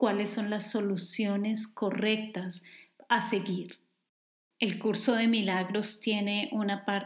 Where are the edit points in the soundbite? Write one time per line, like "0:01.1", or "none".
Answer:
none